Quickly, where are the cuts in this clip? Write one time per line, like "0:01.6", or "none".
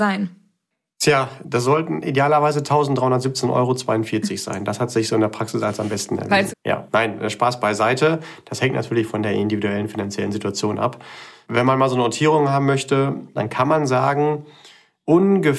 0:06.5
0:13.4

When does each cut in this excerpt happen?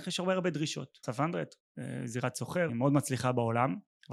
0:01.0
0:02.7

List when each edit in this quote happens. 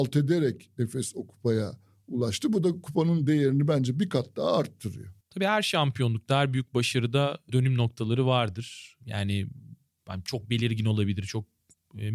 0:05.2

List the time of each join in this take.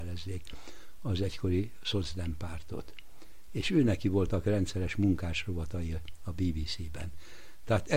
none

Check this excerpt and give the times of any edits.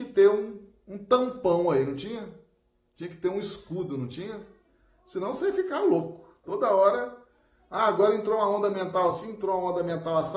none

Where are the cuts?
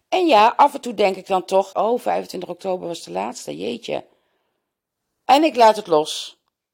0:01.7

